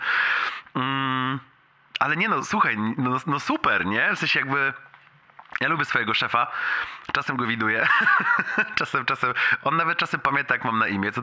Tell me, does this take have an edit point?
no; 0 cuts

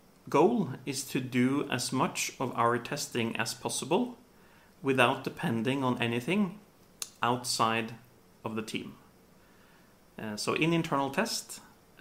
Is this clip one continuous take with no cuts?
yes; 0 cuts

